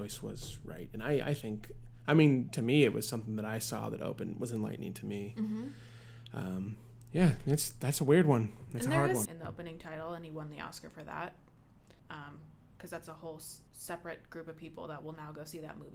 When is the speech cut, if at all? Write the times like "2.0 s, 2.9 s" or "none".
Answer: 9.2 s, 12.0 s, 13.7 s